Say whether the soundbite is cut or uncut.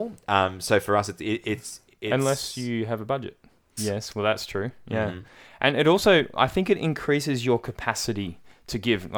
cut